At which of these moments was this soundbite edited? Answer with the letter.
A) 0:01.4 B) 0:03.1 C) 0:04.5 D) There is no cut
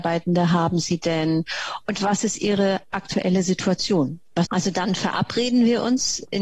C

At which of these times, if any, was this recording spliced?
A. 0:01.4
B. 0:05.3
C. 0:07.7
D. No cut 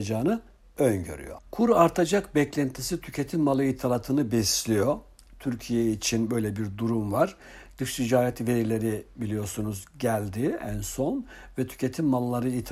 A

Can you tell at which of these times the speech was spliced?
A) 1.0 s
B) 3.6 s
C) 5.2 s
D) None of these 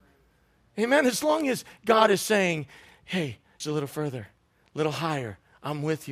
B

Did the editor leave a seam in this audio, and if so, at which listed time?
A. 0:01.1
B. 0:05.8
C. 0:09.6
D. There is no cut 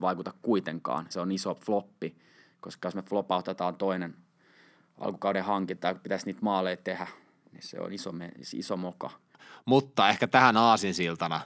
A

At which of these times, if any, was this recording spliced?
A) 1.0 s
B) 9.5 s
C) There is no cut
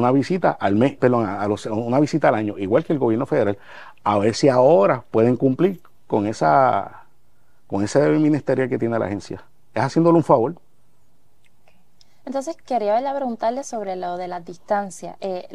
A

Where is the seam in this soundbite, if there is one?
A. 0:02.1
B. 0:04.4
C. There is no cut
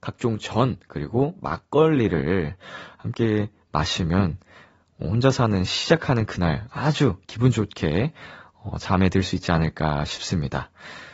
C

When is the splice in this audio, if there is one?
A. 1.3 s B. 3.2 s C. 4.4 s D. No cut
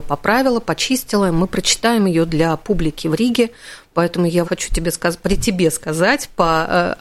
C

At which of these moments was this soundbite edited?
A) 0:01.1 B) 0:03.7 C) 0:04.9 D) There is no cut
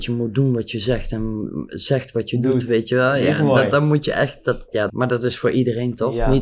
C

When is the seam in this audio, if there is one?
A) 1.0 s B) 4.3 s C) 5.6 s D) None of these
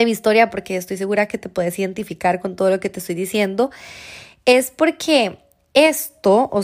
D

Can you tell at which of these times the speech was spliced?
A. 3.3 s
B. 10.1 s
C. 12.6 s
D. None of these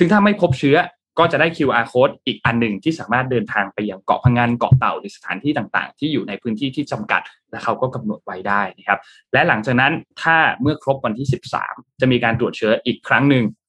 B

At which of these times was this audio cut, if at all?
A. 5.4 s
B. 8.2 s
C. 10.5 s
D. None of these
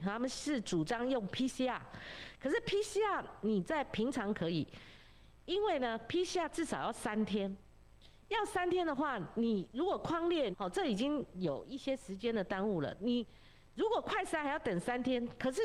C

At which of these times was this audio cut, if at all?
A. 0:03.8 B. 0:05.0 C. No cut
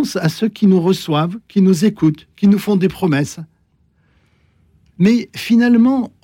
C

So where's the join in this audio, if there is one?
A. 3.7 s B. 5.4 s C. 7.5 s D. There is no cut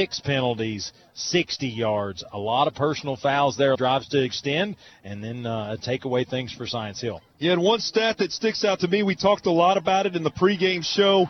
A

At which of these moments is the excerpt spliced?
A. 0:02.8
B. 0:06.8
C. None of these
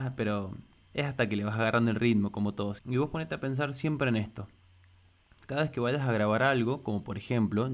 A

